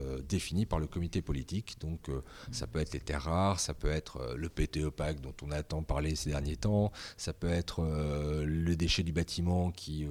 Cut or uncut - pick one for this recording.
uncut